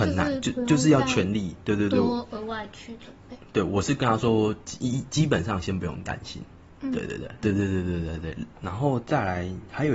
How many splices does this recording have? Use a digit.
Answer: 1